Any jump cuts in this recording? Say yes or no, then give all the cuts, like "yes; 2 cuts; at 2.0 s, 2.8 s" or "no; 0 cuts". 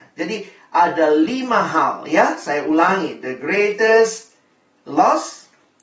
no; 0 cuts